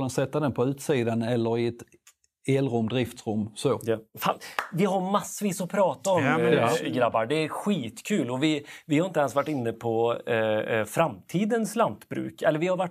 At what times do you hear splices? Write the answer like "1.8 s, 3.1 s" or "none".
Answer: none